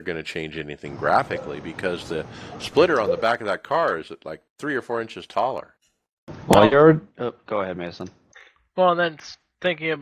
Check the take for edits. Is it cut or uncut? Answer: cut